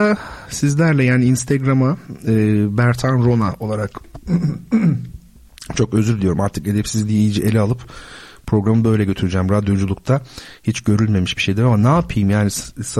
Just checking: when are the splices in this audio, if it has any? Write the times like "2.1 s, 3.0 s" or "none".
none